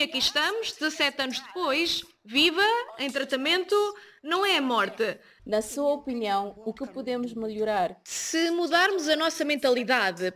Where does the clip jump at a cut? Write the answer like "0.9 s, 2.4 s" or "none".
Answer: 5.4 s